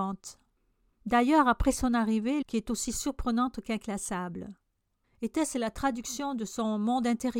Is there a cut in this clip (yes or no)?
yes